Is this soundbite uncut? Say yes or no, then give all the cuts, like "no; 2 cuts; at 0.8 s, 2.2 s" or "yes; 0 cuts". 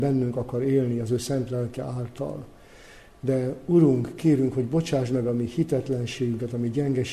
yes; 0 cuts